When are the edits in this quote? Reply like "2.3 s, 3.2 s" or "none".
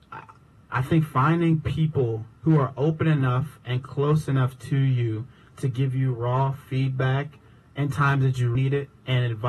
2.4 s, 8.6 s